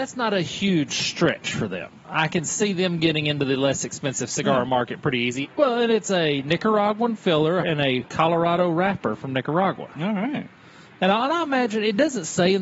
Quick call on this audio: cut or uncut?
cut